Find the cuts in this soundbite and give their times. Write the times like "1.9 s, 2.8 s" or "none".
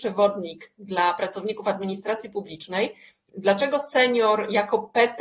3.3 s